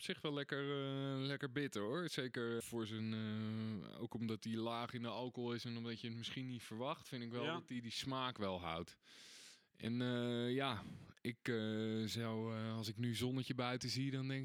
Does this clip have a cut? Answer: yes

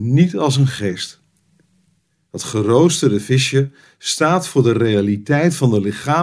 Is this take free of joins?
yes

